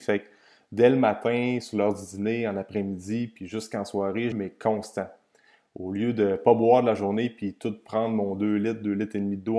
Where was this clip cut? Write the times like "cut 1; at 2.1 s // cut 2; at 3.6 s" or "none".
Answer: cut 1; at 4.3 s